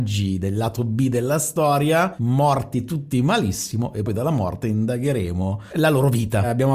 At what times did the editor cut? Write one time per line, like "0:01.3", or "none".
0:04.1